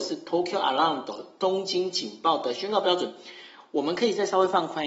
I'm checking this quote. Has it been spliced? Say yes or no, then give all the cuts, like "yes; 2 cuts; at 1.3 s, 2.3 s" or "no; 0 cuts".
no; 0 cuts